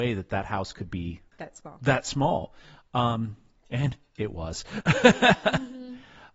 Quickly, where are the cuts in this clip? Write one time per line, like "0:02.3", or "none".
0:01.3